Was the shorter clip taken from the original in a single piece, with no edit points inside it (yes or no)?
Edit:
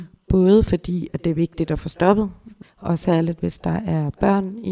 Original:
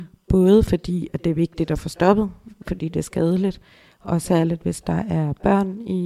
no